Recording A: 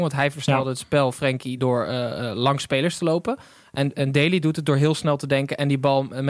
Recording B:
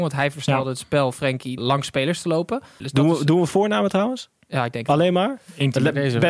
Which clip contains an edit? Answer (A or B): B